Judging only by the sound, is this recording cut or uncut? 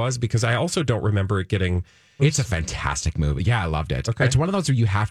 cut